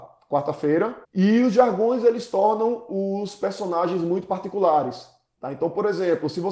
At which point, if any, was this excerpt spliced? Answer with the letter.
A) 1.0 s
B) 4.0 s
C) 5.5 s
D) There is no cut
A